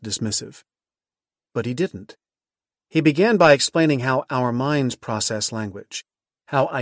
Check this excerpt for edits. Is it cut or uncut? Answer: uncut